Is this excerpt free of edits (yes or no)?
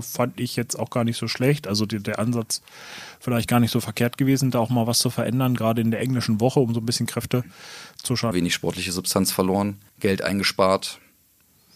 no